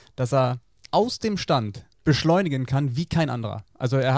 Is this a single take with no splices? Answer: no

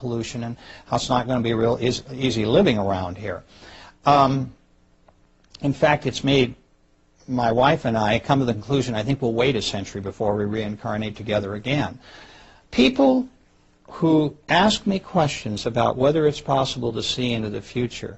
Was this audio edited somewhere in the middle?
yes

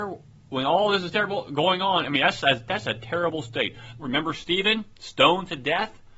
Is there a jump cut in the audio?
yes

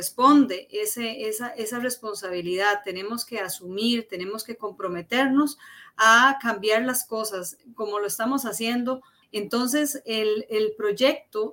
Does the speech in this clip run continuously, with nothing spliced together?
no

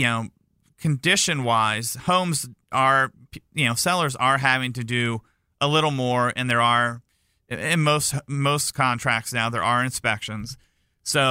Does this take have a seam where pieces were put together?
no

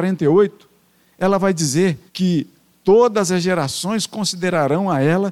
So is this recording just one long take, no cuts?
no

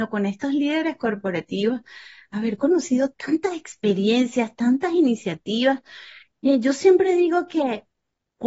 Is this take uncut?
yes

